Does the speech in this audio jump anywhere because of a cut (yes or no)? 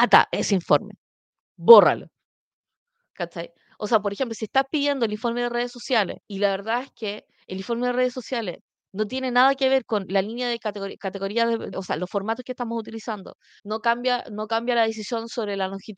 yes